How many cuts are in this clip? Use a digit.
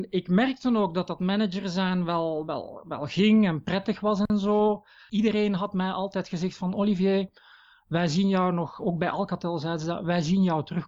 1